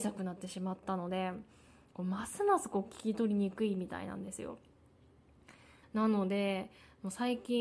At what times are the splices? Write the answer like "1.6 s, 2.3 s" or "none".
5.8 s